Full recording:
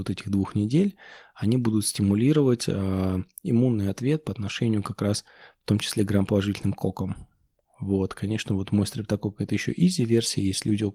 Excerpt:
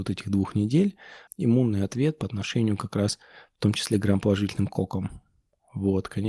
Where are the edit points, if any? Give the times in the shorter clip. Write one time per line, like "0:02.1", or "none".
0:01.3

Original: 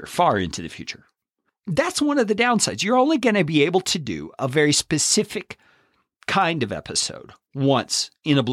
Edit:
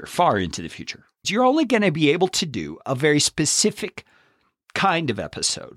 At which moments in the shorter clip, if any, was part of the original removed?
0:01.2

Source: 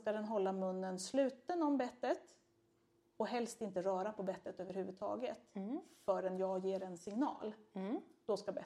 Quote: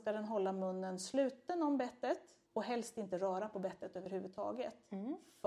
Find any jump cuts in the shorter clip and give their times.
0:02.4

